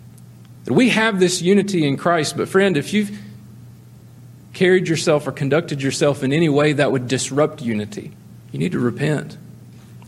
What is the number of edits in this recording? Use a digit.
1